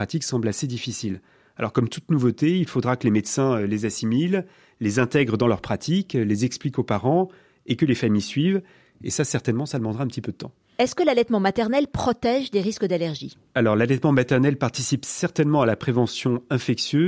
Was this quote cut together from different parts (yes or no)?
no